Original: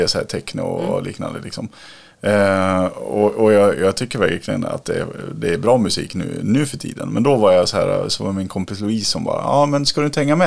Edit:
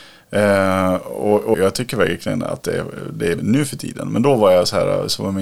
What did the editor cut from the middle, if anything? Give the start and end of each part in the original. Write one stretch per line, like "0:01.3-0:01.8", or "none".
0:03.4-0:03.8
0:05.6-0:06.4